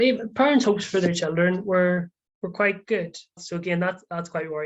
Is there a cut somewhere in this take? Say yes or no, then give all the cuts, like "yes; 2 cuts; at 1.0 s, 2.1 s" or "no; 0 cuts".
yes; 1 cut; at 3.4 s